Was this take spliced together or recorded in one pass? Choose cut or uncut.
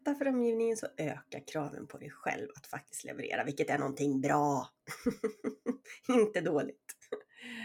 uncut